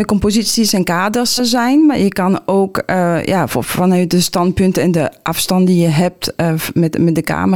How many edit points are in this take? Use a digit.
2